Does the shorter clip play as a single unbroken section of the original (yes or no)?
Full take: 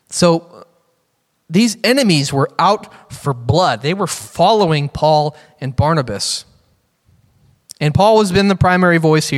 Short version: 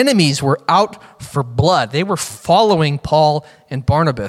yes